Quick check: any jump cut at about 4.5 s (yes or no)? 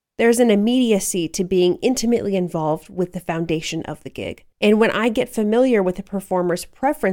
yes